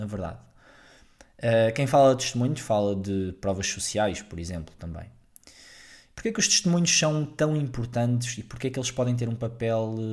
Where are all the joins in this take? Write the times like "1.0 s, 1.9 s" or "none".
none